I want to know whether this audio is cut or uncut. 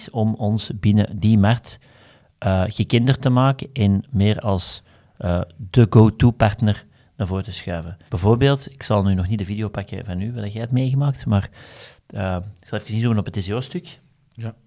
cut